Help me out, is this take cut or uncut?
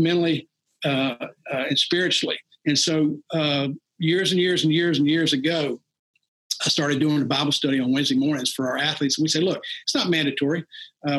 uncut